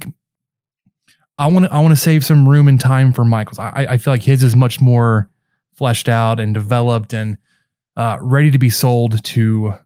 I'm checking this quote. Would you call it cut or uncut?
uncut